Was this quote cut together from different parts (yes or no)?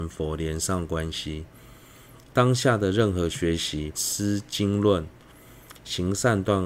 yes